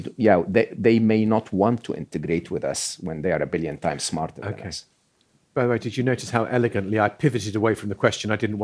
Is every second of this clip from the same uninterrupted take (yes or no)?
yes